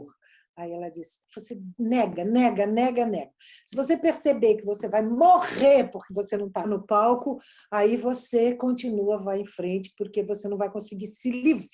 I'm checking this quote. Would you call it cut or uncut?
uncut